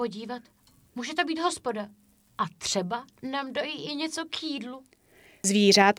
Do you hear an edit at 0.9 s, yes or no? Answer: no